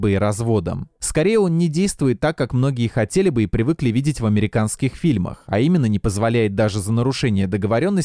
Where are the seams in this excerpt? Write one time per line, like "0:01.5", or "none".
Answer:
0:01.0